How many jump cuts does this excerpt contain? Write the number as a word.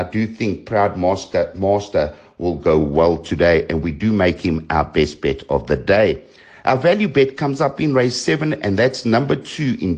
zero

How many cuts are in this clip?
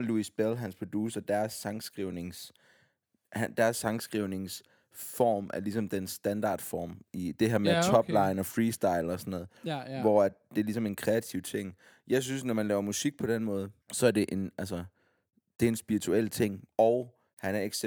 two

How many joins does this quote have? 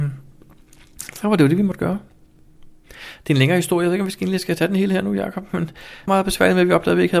one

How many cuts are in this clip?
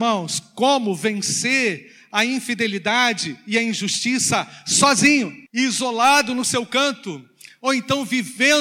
one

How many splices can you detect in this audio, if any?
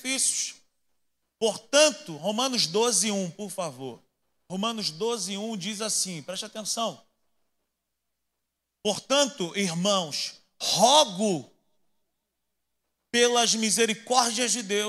zero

